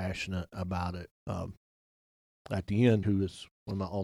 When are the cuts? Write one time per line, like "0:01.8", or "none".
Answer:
0:01.1
0:03.0